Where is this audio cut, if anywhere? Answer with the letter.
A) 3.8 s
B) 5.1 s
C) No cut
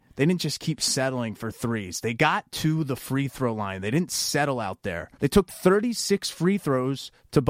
B